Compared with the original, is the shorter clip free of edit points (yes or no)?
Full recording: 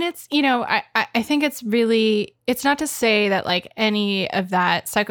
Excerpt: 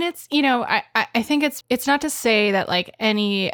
no